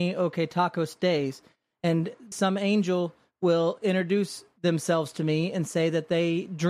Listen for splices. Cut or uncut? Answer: cut